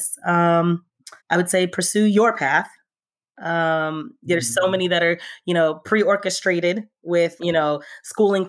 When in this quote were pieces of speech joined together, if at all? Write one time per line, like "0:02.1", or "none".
0:01.2
0:07.4